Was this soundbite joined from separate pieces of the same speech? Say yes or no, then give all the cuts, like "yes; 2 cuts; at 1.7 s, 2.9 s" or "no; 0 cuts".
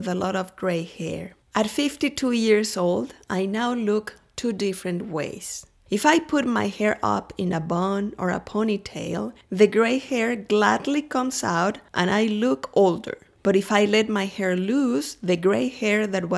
no; 0 cuts